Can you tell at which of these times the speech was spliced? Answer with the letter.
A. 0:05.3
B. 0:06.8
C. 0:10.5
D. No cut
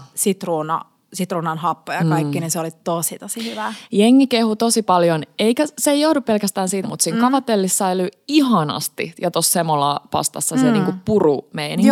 B